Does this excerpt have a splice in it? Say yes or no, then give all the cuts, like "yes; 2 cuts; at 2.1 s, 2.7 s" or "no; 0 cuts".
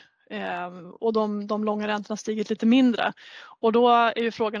no; 0 cuts